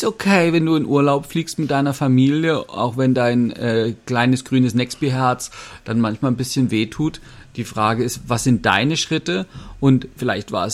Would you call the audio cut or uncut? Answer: uncut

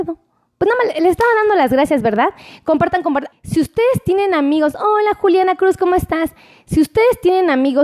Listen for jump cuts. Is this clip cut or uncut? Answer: cut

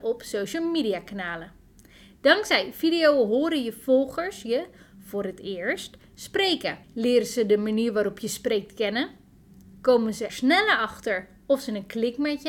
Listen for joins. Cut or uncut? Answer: cut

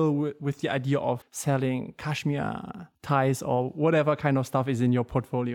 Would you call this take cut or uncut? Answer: cut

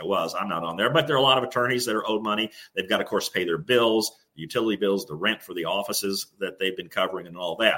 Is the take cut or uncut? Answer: uncut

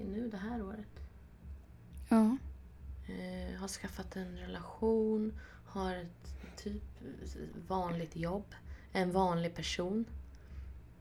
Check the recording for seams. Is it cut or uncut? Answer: uncut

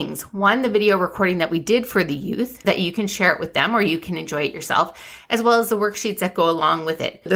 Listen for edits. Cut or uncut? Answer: cut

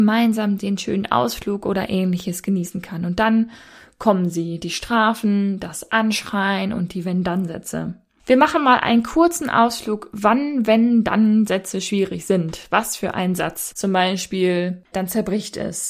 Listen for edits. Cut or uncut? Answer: cut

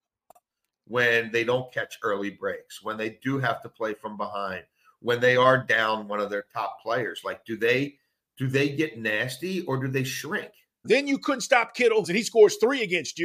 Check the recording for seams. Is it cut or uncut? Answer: cut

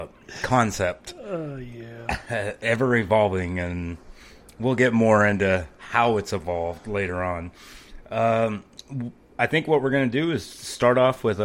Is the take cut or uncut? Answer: uncut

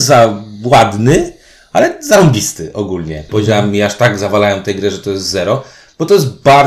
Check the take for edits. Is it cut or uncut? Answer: cut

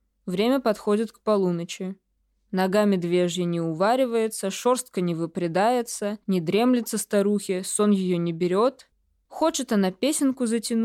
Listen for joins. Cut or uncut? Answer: uncut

